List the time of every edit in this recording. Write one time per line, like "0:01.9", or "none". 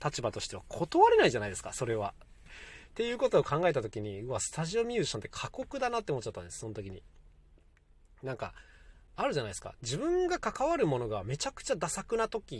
0:02.5

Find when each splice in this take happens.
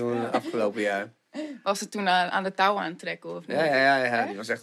none

